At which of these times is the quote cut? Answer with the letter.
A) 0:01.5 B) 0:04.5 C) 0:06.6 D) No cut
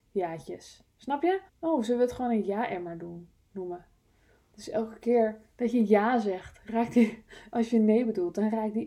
A